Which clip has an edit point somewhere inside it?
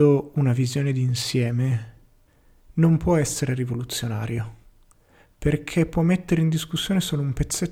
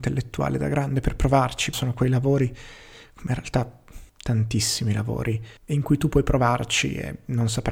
second; 3 cuts; at 1.7 s, 4.1 s, 5.6 s

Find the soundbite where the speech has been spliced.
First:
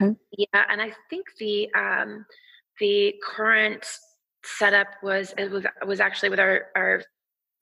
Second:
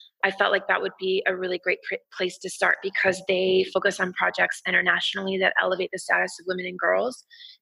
first; 1 cut; at 5.4 s

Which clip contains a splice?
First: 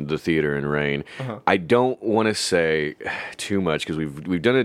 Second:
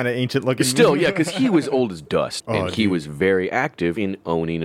second; 1 cut; at 2.4 s

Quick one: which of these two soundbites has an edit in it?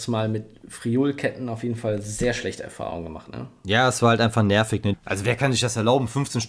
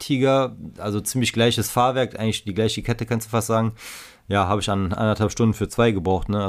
first; 1 cut; at 4.9 s

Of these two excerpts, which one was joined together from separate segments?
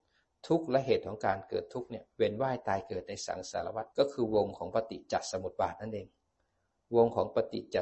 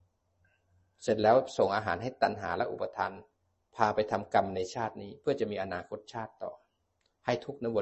first; 1 cut; at 3.9 s

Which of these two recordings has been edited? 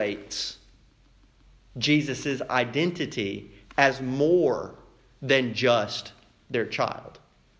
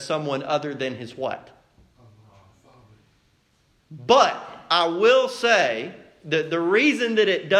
second; 1 cut; at 3.8 s

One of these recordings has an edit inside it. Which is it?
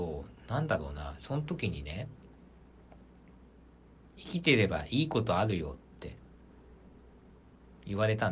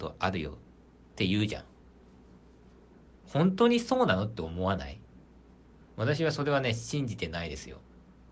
second; 1 cut; at 3.2 s

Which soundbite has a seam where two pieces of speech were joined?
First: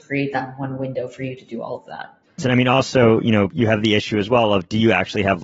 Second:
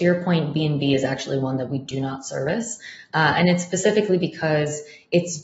first; 1 cut; at 2.4 s

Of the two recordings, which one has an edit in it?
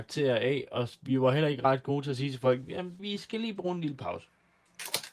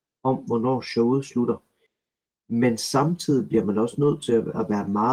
first; 1 cut; at 3.0 s

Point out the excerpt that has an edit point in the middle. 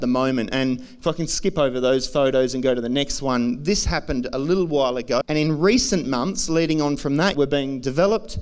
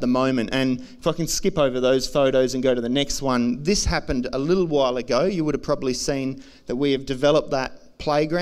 first; 2 cuts; at 5.2 s, 7.3 s

